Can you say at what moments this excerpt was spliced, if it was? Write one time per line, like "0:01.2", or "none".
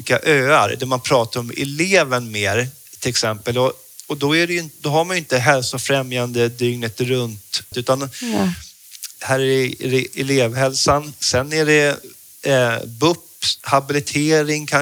0:07.7
0:09.1